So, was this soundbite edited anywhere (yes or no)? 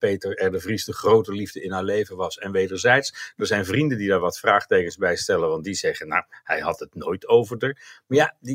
no